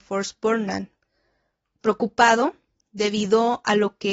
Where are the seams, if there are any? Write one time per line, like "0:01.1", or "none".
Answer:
0:01.8